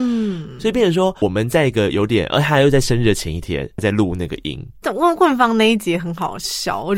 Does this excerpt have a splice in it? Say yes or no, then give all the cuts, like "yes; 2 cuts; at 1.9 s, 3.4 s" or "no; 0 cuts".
yes; 2 cuts; at 1.2 s, 3.8 s